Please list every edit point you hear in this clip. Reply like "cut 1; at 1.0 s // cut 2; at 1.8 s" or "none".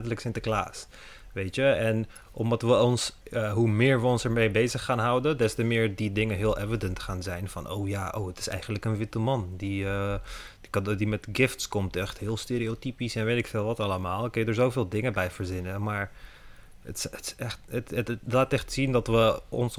cut 1; at 3.2 s

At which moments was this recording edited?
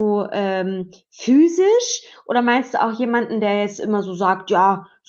none

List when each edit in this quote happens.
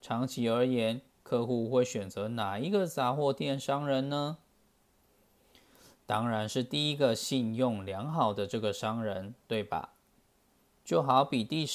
cut 1; at 10.8 s

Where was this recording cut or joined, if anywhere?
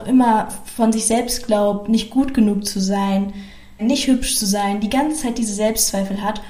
cut 1; at 3.8 s

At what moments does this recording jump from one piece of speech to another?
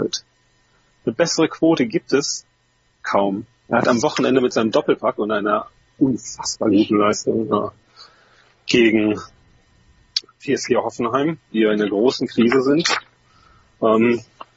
cut 1; at 3.7 s

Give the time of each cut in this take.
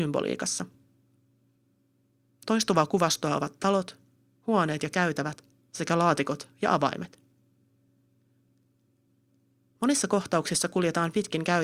none

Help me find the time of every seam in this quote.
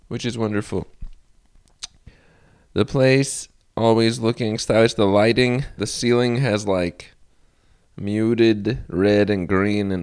cut 1; at 5.8 s

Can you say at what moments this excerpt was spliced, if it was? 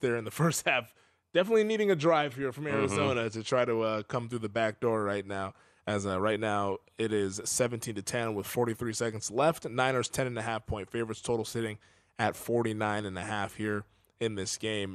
none

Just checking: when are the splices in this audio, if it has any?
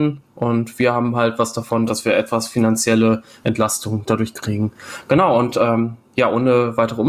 cut 1; at 1.9 s

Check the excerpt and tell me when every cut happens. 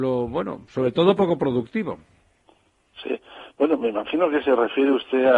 none

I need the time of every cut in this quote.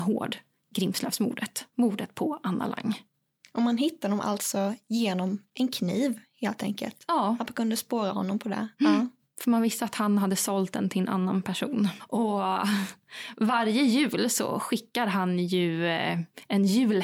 cut 1; at 12.0 s

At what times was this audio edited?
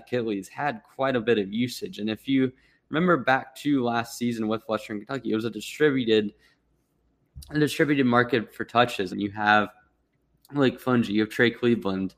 cut 1; at 9.1 s

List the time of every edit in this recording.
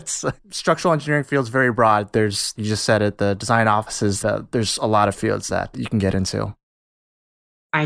cut 1; at 2.6 s // cut 2; at 4.2 s // cut 3; at 5.7 s

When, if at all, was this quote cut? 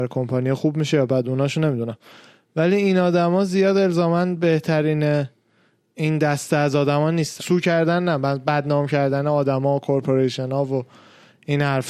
cut 1; at 7.4 s

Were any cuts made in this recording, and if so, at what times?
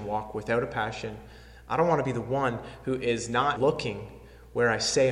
cut 1; at 3.6 s

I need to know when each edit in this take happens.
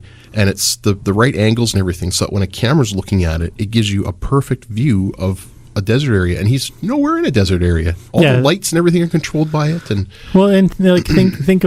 none

